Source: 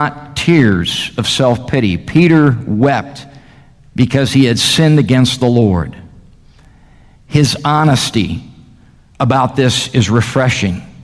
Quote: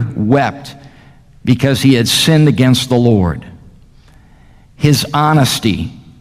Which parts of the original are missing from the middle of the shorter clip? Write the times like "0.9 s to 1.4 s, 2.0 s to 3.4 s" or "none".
none